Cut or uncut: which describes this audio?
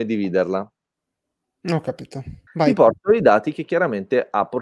cut